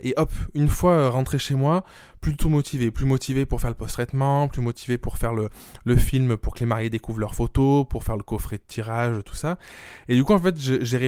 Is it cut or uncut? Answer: uncut